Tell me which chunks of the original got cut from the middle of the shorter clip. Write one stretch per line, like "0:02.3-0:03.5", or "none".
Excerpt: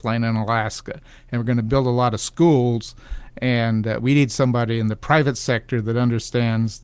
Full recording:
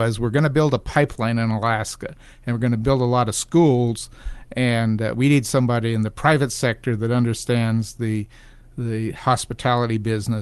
none